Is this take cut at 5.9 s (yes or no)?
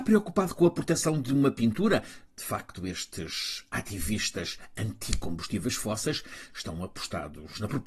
no